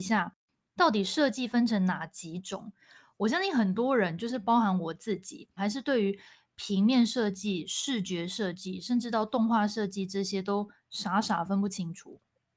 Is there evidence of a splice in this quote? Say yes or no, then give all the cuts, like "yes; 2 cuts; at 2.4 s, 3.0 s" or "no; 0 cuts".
yes; 1 cut; at 5.6 s